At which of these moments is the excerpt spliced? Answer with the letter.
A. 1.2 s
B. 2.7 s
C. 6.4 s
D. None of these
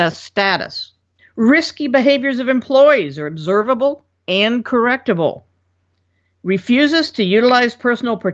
A